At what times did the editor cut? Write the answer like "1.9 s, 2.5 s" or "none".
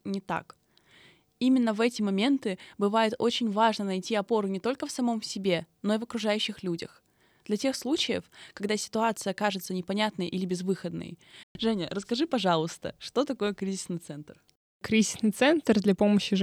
11.4 s